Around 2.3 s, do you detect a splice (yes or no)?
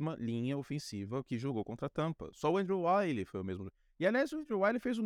no